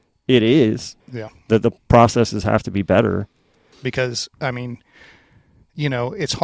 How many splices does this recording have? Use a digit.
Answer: 2